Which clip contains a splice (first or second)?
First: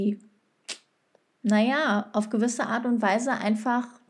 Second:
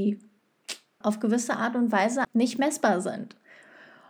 second